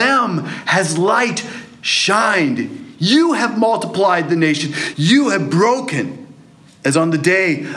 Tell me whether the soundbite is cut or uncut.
cut